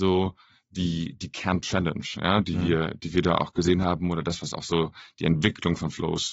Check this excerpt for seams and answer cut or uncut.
uncut